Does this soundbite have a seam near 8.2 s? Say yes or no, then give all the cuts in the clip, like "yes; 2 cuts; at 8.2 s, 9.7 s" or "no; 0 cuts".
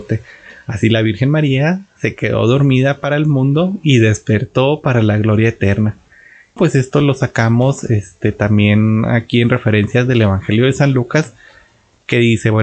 no; 1 cut; at 6.6 s